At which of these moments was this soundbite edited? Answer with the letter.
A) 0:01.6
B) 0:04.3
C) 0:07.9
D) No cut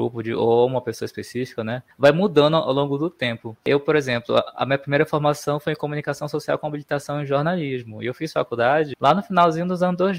D